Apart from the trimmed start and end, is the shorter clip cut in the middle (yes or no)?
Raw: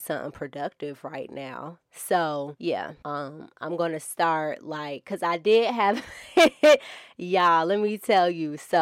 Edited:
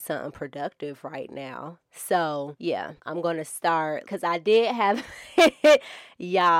yes